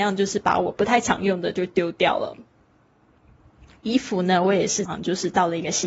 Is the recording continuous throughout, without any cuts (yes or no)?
no